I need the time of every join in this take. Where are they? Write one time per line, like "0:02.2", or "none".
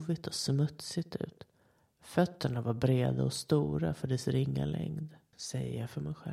0:05.3